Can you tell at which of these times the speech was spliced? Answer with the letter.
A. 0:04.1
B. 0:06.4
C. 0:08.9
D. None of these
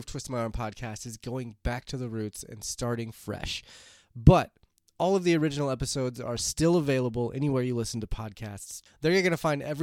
C